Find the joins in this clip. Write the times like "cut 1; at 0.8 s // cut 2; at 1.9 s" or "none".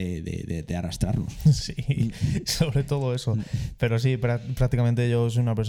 none